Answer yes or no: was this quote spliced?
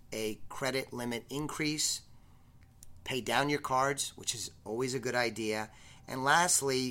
no